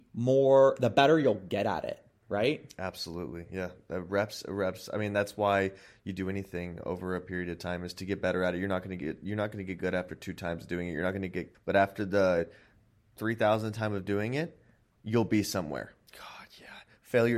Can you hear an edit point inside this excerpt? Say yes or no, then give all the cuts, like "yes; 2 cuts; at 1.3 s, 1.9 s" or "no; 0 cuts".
yes; 2 cuts; at 11.5 s, 16.1 s